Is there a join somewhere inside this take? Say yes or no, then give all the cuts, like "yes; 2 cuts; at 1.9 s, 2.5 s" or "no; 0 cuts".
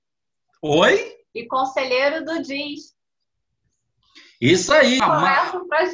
yes; 1 cut; at 5.0 s